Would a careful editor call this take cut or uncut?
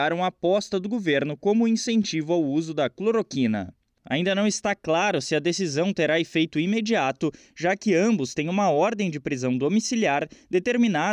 cut